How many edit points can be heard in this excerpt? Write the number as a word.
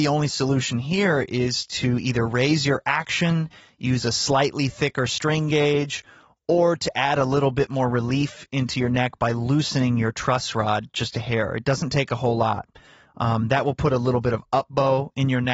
zero